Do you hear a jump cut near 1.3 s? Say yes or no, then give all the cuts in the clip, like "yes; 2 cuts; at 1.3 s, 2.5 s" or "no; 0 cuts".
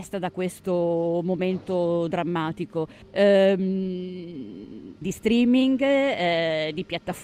no; 2 cuts; at 3.0 s, 5.0 s